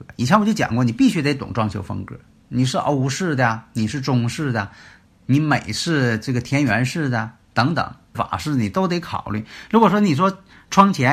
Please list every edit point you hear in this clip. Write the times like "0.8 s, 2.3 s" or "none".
5.0 s, 8.1 s

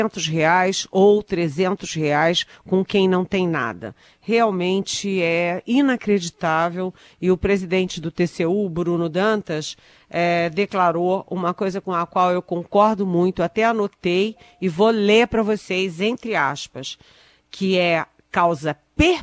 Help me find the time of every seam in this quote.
none

